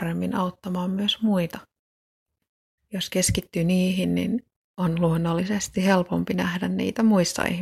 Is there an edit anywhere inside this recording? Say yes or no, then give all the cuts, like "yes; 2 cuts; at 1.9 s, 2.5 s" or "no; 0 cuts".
yes; 1 cut; at 2.8 s